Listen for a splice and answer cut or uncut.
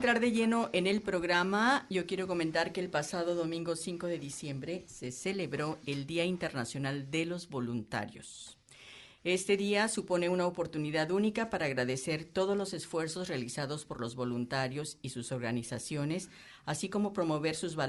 uncut